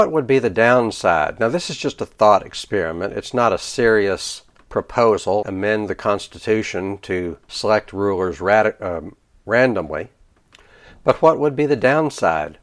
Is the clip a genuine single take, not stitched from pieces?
no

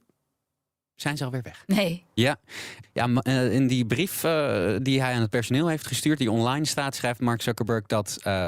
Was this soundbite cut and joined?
yes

